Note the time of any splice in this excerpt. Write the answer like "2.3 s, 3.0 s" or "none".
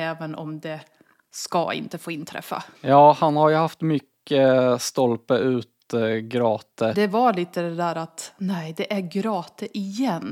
2.7 s, 6.9 s